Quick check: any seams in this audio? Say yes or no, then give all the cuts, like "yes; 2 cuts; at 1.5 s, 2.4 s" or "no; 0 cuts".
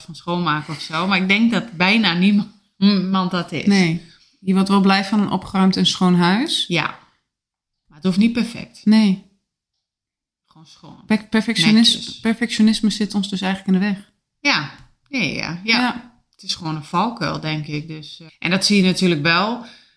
yes; 1 cut; at 18.3 s